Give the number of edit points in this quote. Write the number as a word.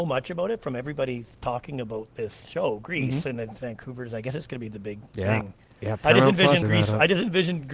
two